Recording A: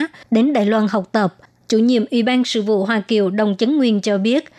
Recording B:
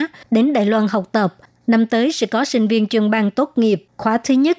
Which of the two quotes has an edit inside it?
A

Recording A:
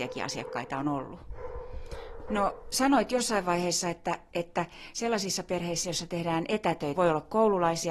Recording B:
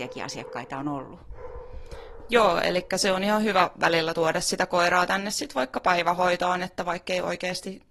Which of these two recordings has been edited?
A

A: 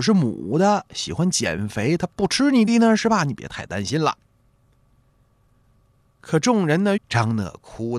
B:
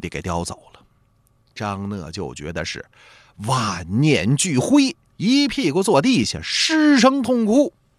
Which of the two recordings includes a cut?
A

